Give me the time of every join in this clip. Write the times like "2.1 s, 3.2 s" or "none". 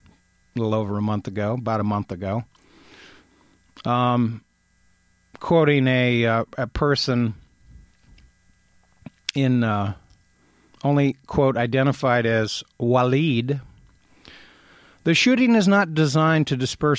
none